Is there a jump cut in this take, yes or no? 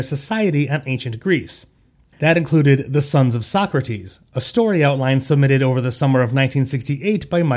yes